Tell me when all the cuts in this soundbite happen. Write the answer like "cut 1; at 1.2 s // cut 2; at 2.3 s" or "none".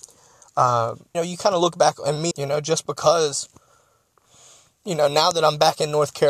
cut 1; at 1.1 s // cut 2; at 2.3 s